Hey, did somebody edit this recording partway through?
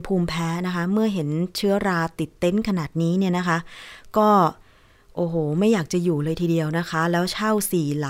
no; 0 cuts

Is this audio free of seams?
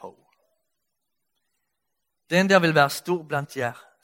no; 1 cut; at 2.2 s

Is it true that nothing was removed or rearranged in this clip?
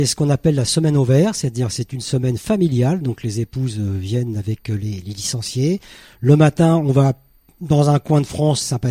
yes; 0 cuts

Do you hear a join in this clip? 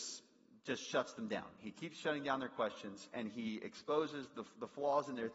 no; 0 cuts

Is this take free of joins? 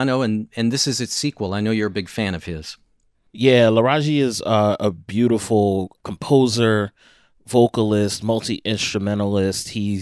yes; 0 cuts

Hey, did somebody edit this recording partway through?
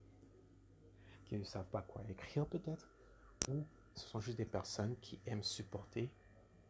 no; 0 cuts

